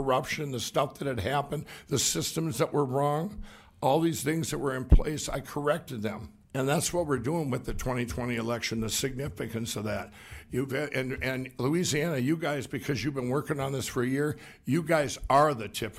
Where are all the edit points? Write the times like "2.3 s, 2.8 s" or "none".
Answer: 6.4 s